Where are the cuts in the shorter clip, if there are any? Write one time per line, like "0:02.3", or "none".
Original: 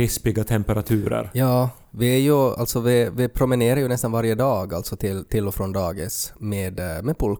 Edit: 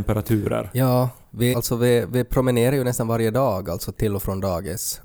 0:01.5
0:03.9